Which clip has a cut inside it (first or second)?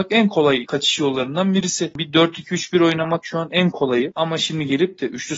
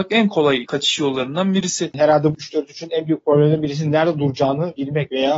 second